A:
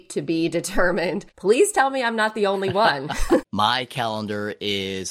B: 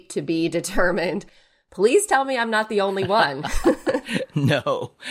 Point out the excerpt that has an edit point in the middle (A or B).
A